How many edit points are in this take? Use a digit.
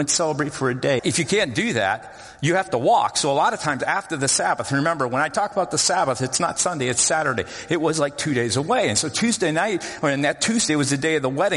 1